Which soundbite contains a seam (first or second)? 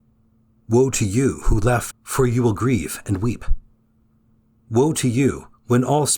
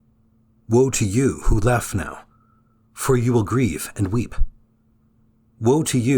first